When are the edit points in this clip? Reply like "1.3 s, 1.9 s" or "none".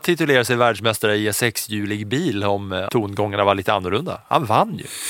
2.9 s